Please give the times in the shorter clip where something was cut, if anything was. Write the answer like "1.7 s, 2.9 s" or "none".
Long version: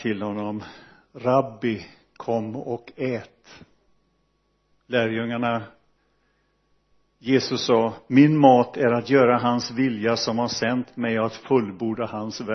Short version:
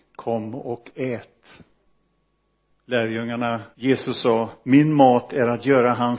3.7 s

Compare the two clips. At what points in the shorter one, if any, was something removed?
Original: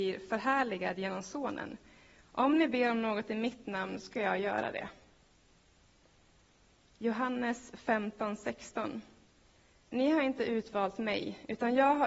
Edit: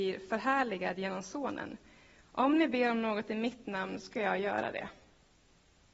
none

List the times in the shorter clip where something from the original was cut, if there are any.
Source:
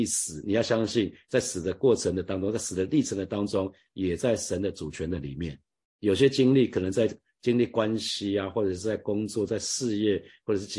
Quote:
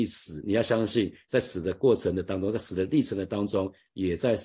none

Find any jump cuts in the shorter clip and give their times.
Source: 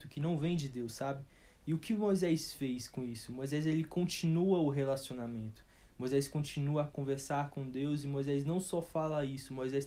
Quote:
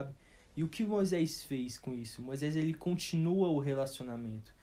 none

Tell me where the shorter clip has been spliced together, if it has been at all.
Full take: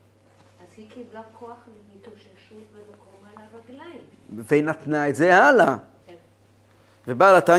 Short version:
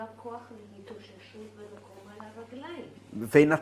none

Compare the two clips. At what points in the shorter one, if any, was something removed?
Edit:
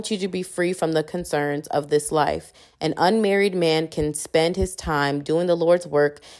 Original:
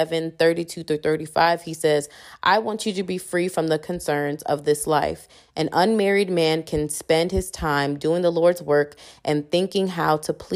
none

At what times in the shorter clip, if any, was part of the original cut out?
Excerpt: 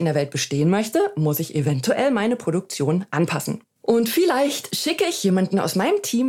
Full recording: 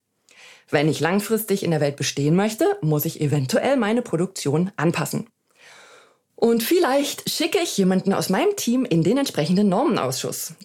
3.7 s

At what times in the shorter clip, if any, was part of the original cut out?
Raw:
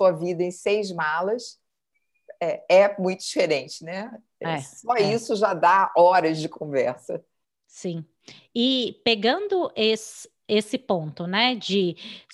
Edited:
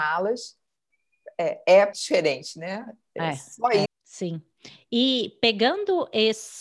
1.9 s, 3.8 s

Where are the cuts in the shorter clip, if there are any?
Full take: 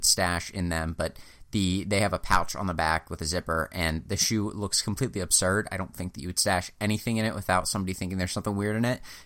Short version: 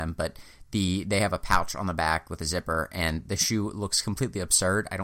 none

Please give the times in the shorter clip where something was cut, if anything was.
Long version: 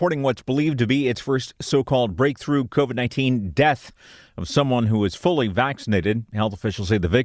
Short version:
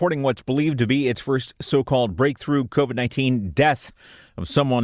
none

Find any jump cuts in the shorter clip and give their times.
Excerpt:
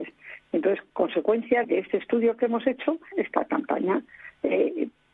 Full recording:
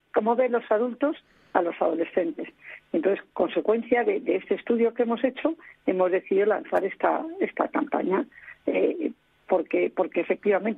1.6 s, 3.1 s

